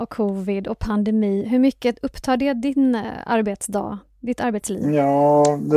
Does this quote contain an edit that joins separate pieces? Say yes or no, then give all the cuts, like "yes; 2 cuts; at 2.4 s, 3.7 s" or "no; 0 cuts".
no; 0 cuts